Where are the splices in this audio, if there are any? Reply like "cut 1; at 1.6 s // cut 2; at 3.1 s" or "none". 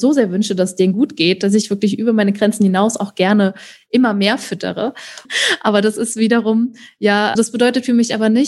cut 1; at 5.2 s // cut 2; at 7.3 s